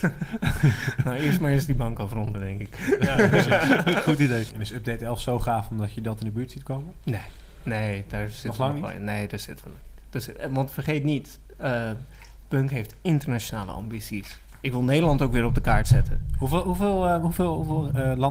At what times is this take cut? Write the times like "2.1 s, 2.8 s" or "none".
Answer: 4.5 s